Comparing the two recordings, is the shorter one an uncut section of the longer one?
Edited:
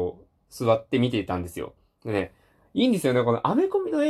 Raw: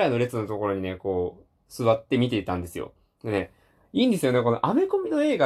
yes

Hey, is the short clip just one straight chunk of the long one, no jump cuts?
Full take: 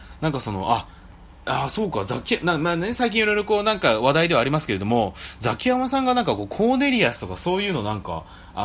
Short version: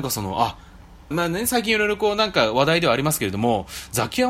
no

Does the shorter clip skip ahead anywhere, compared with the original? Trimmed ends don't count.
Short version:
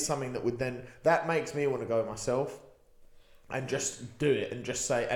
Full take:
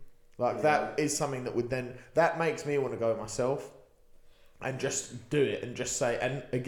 no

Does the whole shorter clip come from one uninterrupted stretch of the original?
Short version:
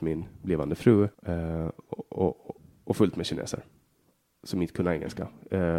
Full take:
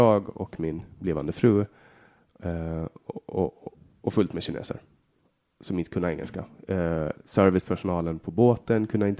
no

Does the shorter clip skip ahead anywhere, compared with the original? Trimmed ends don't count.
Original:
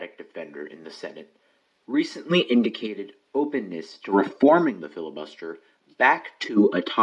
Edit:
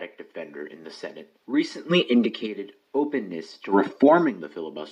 yes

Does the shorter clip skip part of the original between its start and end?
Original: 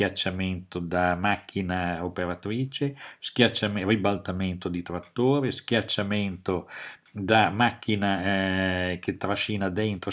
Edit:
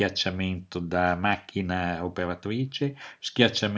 no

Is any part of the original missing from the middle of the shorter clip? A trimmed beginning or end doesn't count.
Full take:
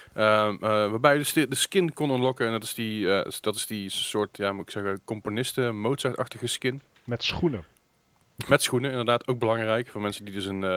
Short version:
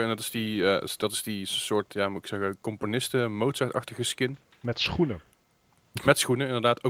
no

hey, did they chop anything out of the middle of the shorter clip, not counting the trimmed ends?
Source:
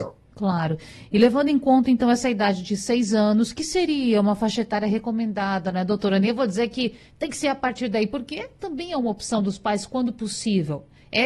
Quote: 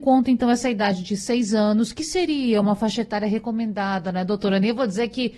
no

